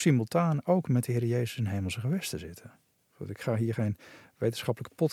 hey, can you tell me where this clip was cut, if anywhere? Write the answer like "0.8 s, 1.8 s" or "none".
3.1 s